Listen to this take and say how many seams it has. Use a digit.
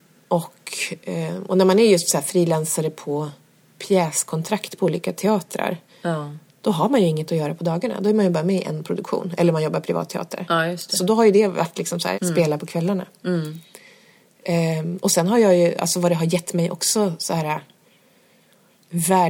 1